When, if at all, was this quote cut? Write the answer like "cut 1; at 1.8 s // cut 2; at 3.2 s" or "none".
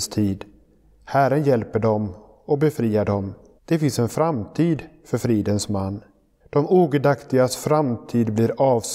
cut 1; at 3.6 s // cut 2; at 6.4 s